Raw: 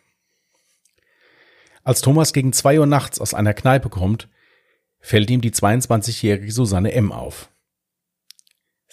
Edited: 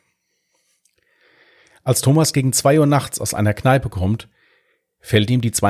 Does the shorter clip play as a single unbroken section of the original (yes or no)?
yes